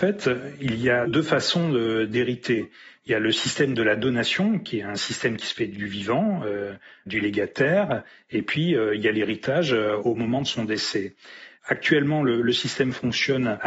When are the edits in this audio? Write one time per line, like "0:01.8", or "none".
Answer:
none

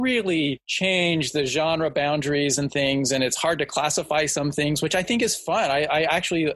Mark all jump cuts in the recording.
none

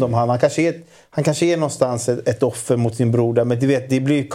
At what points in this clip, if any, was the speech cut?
none

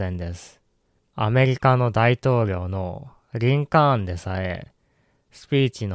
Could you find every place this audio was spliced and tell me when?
0:01.0

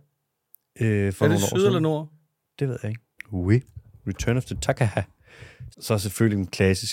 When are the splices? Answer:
0:03.2
0:05.7

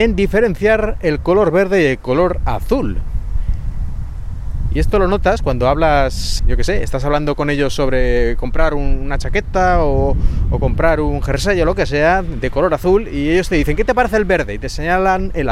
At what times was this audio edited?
0:06.4

